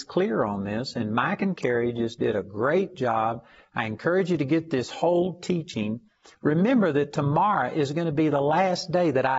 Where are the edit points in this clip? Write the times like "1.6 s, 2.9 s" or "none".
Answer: none